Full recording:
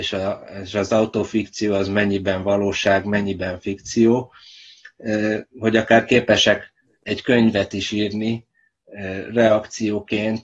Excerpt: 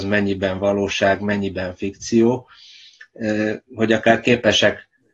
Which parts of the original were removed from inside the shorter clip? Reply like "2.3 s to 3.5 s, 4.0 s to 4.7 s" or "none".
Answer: none